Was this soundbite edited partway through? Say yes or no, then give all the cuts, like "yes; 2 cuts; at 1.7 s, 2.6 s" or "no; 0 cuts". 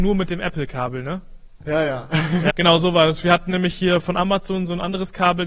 yes; 1 cut; at 2.5 s